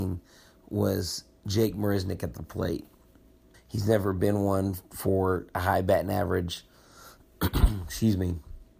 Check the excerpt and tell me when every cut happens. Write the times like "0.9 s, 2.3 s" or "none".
3.5 s